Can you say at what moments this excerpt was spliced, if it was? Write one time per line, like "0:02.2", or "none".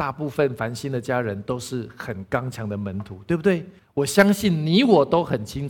0:03.8